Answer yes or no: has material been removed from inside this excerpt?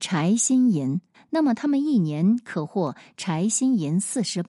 yes